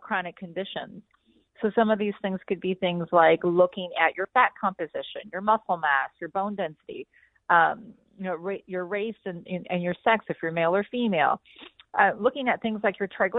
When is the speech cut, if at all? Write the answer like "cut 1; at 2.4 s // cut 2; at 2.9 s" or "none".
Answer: none

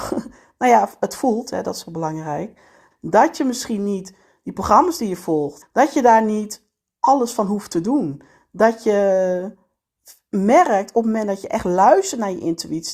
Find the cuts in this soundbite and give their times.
cut 1; at 2.9 s // cut 2; at 5.6 s

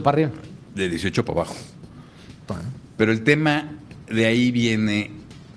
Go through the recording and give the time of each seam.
cut 1; at 2.5 s

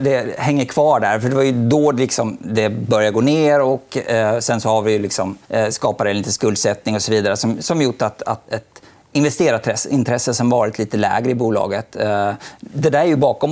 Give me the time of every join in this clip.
cut 1; at 5.4 s // cut 2; at 8.5 s

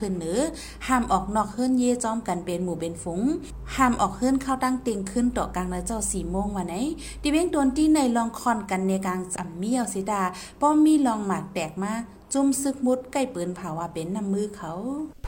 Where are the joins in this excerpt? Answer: cut 1; at 9.4 s

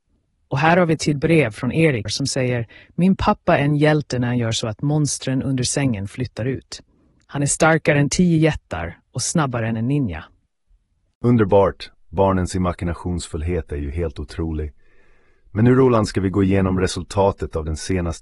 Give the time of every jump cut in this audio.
cut 1; at 2.1 s

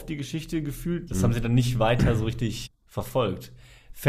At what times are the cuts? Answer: cut 1; at 1.1 s // cut 2; at 2.7 s

